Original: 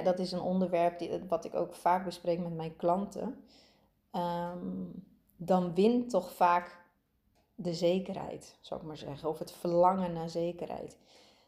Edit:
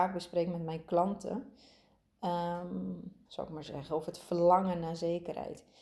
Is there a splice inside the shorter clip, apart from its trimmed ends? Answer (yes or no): yes